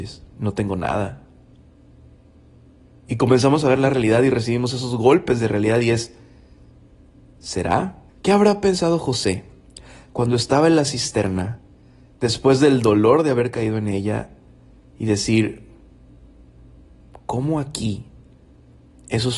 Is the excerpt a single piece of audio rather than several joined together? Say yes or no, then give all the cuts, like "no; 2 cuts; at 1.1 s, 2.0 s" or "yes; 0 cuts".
no; 1 cut; at 8.1 s